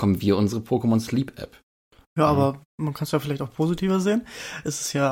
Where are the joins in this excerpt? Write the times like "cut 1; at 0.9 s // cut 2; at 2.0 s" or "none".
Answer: none